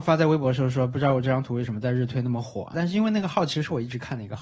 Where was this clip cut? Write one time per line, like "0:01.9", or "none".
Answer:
0:02.7